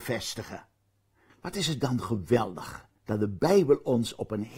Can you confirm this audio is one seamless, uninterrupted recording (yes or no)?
no